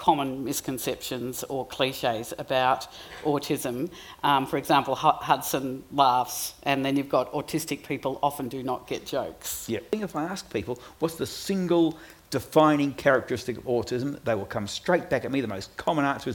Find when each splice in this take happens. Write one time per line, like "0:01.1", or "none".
none

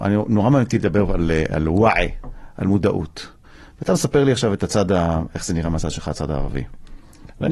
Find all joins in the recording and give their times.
none

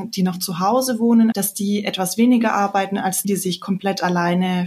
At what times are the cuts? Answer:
0:01.3
0:03.2

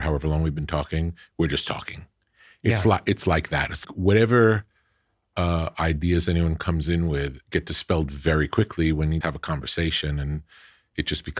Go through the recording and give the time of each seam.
0:03.8
0:09.2

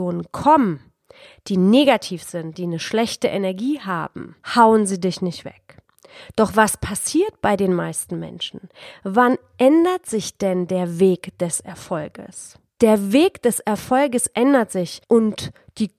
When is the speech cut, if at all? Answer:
0:12.7

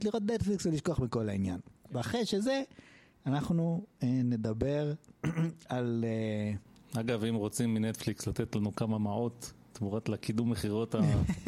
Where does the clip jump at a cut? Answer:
none

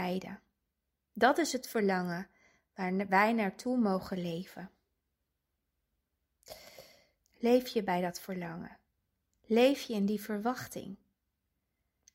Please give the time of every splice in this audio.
0:07.2

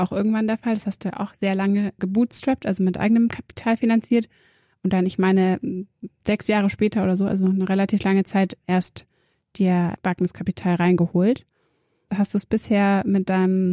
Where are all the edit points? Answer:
0:02.0
0:12.1

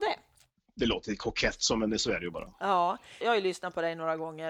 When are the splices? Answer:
0:03.2

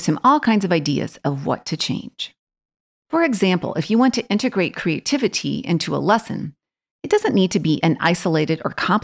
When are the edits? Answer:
0:03.0

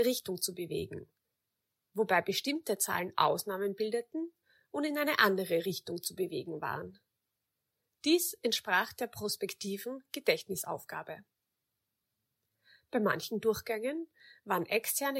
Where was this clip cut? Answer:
none

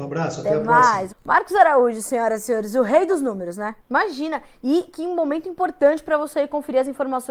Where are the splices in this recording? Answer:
0:01.1
0:03.8

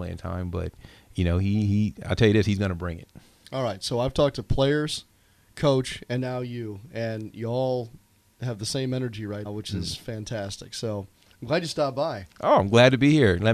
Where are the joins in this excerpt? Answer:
0:09.4

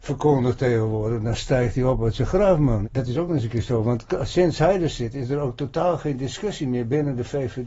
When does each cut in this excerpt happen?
0:02.8

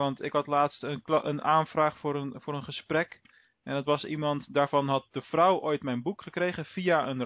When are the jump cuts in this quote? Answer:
none

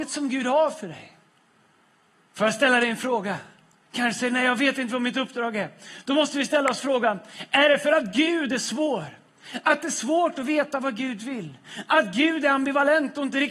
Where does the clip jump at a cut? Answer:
0:03.8

